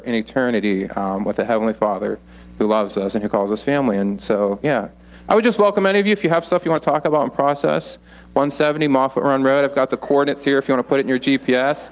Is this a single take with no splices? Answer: yes; 0 cuts

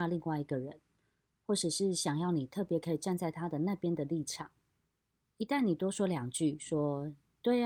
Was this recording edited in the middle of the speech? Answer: no; 0 cuts

